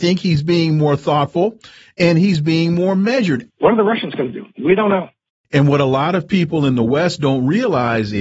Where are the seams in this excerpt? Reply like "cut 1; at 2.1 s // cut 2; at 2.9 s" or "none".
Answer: cut 1; at 3.5 s // cut 2; at 5.4 s